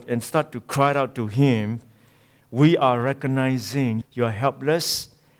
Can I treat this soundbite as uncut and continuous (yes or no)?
no